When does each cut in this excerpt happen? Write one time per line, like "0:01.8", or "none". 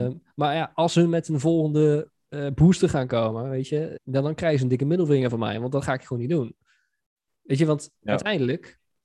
0:04.0